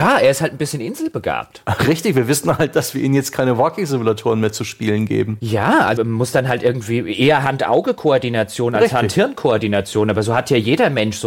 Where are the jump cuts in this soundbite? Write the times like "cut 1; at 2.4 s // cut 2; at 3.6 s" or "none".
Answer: cut 1; at 6.0 s